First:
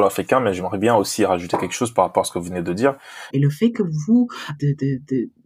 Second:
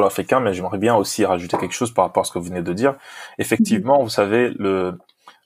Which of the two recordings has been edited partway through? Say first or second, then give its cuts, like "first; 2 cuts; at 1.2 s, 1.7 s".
first; 2 cuts; at 3.3 s, 4.6 s